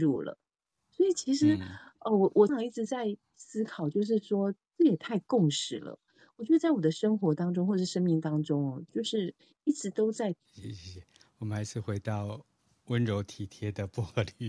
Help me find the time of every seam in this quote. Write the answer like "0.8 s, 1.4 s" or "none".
2.5 s, 10.5 s